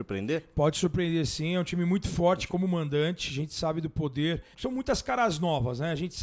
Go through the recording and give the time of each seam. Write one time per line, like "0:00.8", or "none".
0:04.5